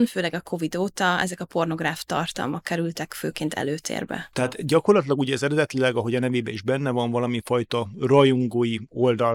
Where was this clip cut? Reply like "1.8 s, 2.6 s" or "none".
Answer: 4.3 s